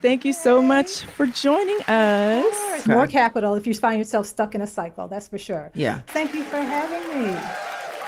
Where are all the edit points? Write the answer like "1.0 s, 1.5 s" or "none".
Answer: 2.9 s, 6.1 s